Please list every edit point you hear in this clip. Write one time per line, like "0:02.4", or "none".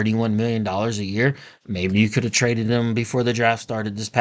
none